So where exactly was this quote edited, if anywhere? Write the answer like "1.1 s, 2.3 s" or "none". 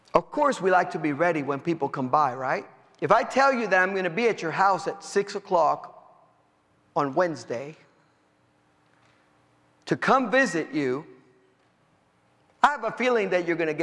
none